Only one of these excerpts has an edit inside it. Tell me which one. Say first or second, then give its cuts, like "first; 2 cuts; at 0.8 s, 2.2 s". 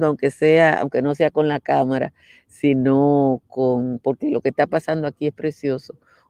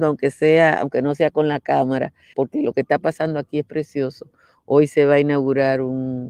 second; 1 cut; at 2.3 s